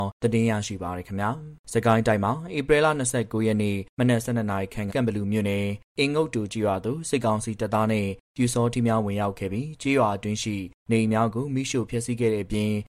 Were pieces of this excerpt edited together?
yes; 2 cuts; at 1.6 s, 4.9 s

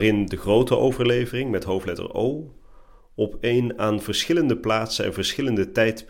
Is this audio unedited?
yes; 0 cuts

